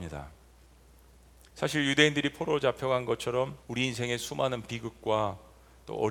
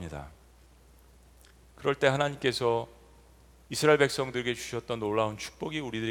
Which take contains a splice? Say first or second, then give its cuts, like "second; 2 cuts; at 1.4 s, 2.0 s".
first; 2 cuts; at 1.5 s, 3.6 s